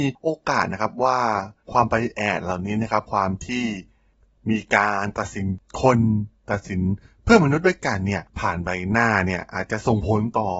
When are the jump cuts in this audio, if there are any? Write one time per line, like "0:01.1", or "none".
0:01.6